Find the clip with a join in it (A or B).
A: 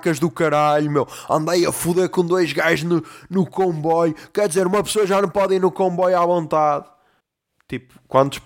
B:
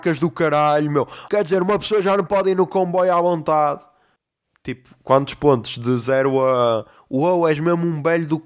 B